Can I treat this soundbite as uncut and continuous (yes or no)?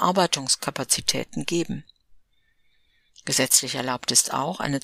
yes